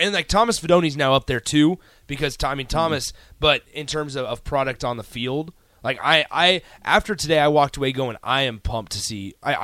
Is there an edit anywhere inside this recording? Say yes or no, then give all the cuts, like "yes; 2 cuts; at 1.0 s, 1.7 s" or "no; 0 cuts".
no; 0 cuts